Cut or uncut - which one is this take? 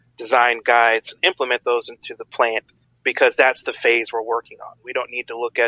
uncut